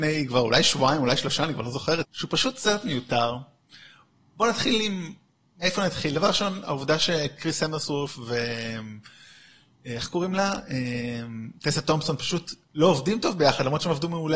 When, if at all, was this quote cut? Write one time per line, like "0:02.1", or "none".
0:02.0